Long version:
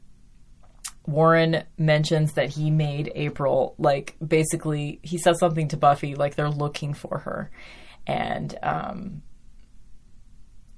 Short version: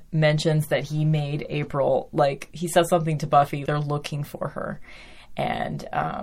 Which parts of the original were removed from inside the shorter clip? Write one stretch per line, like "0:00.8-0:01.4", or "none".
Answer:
0:04.2-0:05.0
0:06.2-0:06.4